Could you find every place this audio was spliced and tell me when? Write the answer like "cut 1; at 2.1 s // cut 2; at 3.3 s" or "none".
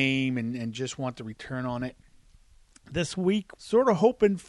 cut 1; at 3.6 s